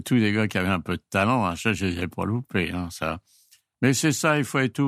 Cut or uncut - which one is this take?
uncut